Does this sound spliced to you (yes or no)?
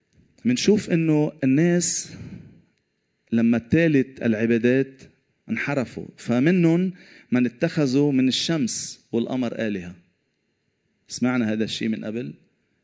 yes